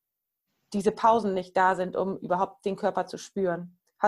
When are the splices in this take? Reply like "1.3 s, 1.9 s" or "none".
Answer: none